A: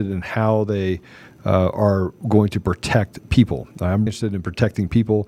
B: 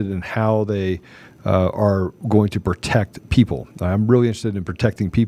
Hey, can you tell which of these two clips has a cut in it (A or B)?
A